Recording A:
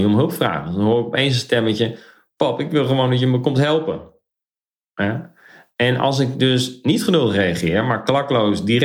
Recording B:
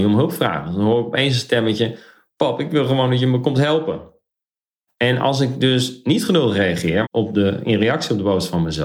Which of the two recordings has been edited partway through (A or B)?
B